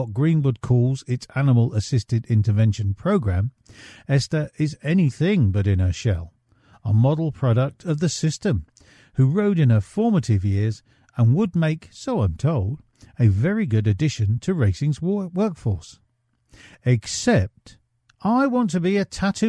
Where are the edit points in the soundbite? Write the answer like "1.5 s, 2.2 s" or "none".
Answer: none